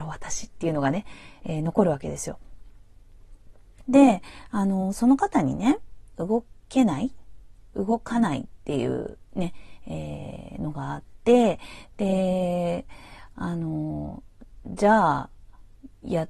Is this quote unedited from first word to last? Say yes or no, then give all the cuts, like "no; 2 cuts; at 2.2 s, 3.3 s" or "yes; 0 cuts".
no; 2 cuts; at 3.8 s, 6.1 s